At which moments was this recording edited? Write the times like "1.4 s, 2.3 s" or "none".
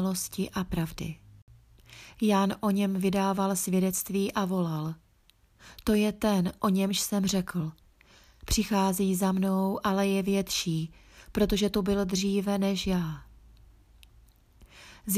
none